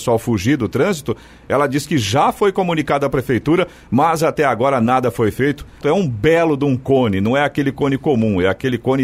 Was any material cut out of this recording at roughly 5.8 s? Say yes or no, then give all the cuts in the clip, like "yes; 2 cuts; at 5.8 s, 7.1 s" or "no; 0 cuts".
yes; 1 cut; at 5.8 s